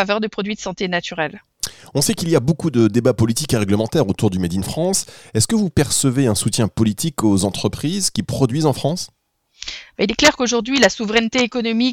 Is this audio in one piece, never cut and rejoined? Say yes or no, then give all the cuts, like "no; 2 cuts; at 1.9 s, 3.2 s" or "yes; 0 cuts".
yes; 0 cuts